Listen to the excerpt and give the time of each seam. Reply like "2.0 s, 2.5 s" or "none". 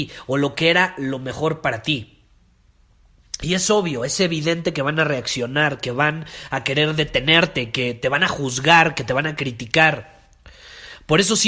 none